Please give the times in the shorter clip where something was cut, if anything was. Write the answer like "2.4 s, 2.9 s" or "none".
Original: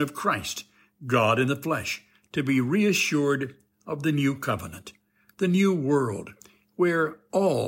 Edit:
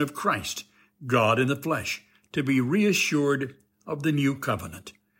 none